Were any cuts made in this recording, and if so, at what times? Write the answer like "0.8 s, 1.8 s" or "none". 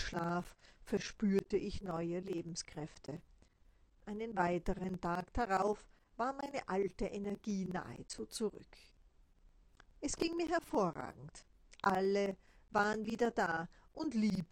none